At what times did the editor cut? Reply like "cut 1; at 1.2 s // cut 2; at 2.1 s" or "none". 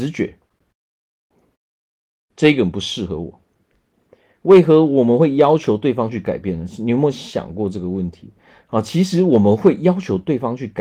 none